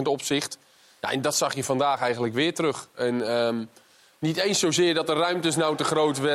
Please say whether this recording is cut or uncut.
uncut